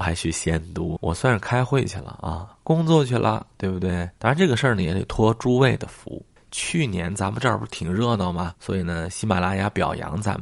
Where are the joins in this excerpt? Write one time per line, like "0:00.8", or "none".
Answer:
0:04.2
0:08.5